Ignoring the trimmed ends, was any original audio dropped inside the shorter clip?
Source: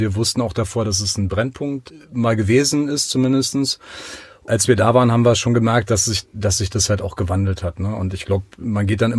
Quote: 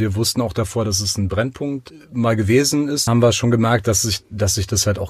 yes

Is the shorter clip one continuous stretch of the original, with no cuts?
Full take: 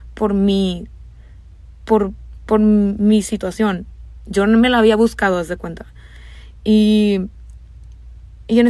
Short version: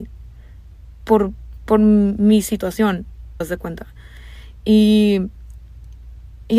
no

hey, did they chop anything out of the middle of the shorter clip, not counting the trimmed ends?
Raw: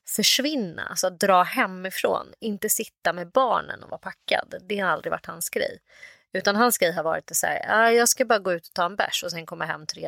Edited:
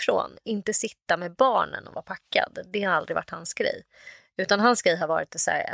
no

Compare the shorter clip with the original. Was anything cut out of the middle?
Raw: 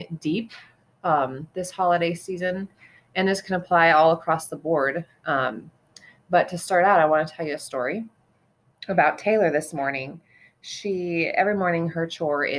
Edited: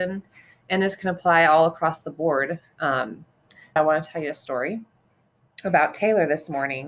yes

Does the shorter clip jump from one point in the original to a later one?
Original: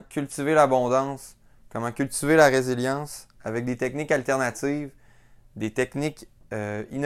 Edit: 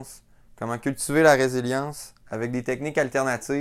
no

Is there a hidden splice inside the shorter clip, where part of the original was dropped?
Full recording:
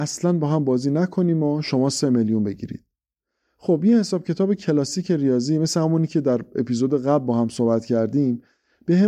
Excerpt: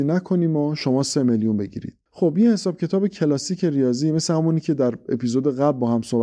yes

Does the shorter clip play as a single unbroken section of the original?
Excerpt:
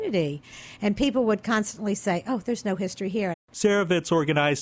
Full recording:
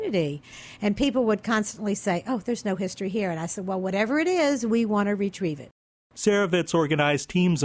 no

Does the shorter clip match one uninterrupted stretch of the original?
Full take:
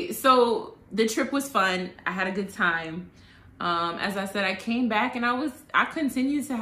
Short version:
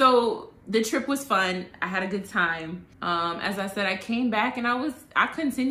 no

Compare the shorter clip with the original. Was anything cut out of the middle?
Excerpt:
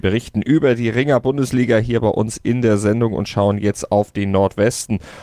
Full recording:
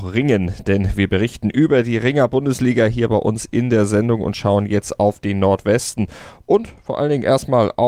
no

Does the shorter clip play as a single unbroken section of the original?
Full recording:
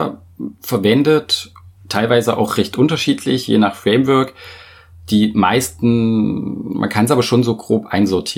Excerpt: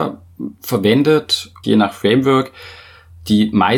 no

